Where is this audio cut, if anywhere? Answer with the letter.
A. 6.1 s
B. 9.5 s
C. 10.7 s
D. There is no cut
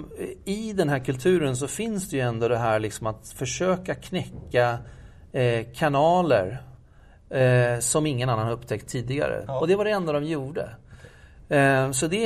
B